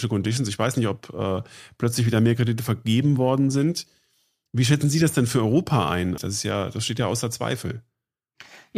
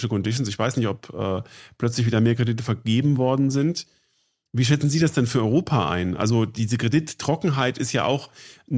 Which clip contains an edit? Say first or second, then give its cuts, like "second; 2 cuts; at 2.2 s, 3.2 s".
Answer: first; 1 cut; at 6.2 s